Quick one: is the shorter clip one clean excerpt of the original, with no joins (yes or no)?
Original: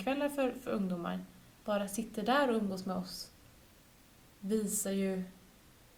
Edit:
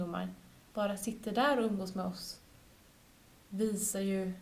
yes